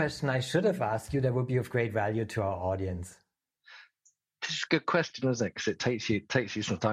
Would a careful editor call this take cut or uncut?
uncut